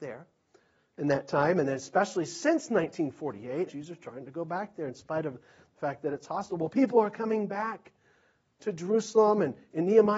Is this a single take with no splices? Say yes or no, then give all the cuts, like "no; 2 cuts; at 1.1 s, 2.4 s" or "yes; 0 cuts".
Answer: no; 1 cut; at 3.7 s